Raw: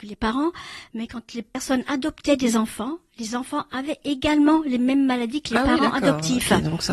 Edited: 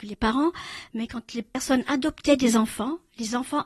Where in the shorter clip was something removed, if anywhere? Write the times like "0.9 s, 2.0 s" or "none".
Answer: none